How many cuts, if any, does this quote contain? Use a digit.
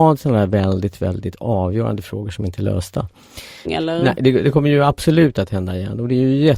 1